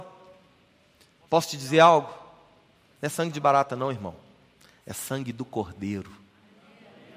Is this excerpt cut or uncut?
uncut